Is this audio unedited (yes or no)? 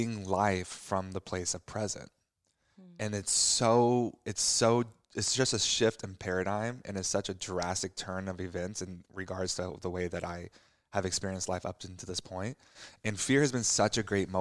yes